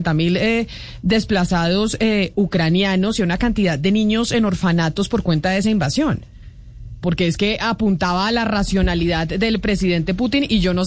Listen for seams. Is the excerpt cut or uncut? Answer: cut